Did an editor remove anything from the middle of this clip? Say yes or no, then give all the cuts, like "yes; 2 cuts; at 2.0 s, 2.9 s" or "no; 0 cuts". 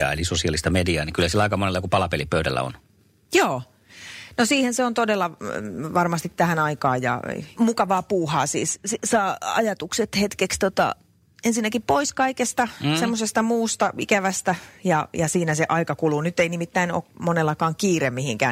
yes; 1 cut; at 7.6 s